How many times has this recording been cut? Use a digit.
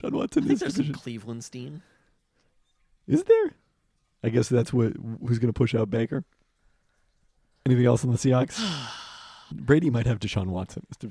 1